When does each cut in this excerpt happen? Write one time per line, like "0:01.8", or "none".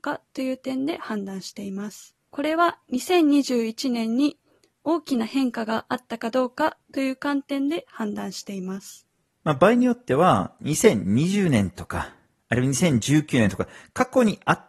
0:02.2